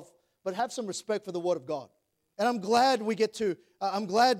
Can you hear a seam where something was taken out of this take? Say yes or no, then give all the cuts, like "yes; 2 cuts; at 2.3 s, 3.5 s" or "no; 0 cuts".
yes; 1 cut; at 2.3 s